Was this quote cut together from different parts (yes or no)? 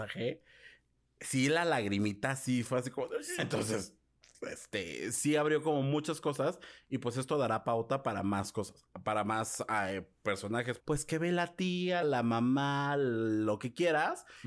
yes